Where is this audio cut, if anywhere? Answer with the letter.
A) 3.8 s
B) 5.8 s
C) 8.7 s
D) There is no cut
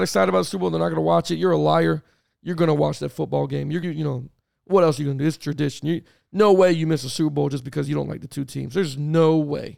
A